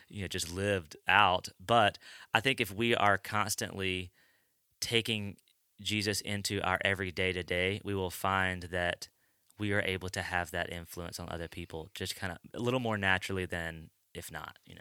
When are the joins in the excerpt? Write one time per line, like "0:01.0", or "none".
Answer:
none